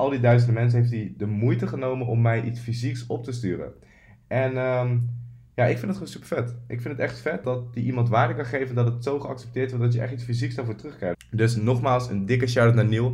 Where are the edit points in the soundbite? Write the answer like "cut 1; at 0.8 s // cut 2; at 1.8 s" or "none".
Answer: cut 1; at 7.4 s // cut 2; at 11.1 s